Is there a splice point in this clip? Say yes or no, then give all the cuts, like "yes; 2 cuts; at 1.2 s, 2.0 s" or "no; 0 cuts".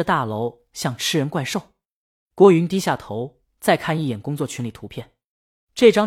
no; 0 cuts